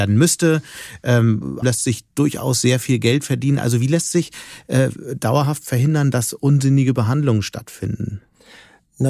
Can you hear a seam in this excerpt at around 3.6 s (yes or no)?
no